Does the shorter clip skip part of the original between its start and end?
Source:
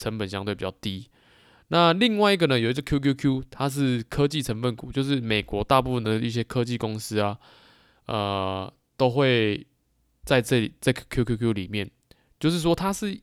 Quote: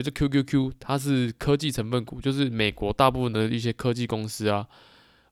no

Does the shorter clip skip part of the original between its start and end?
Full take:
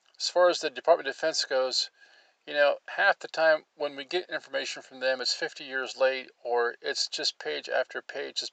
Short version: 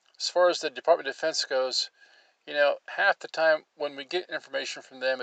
no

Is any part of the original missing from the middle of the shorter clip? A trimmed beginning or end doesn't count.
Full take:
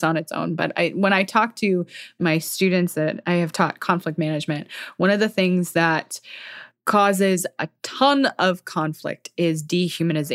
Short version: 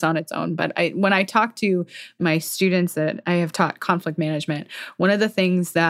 no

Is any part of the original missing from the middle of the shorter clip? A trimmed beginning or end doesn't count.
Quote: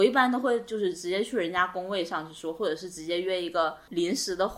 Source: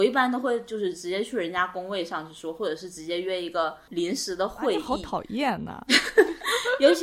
no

